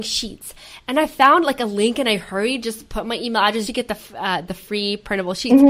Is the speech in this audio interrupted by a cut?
yes; 1 cut; at 3.7 s

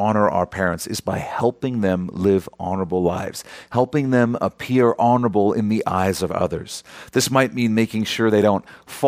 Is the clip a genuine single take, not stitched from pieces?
yes; 0 cuts

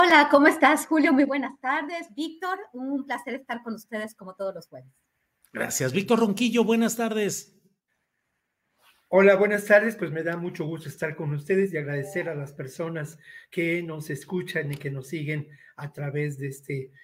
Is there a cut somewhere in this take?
no; 0 cuts

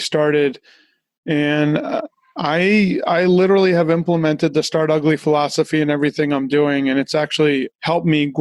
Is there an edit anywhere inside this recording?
no; 0 cuts

